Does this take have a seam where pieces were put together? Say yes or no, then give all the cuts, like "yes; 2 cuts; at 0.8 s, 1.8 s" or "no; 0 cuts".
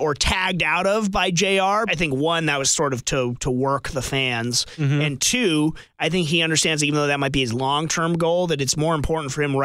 yes; 1 cut; at 1.9 s